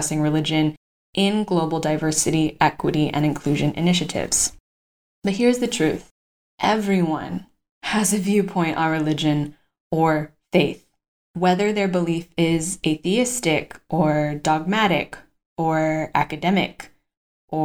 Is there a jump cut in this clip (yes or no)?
no